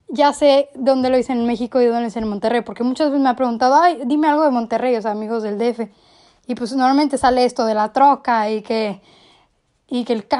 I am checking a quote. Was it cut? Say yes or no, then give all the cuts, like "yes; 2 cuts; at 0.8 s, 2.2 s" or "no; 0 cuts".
no; 0 cuts